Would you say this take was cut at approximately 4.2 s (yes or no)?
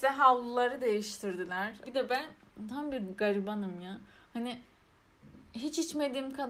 no